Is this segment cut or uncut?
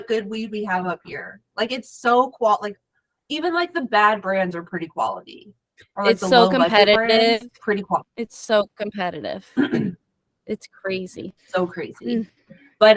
cut